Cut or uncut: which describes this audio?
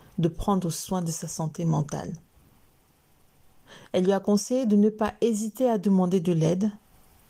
uncut